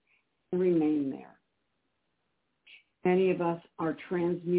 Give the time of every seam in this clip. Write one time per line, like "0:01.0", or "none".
0:02.9